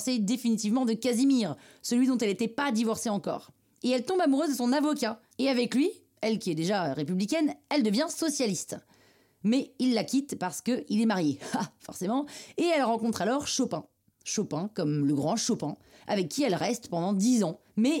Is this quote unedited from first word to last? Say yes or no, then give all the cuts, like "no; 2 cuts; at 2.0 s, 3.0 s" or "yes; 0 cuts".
yes; 0 cuts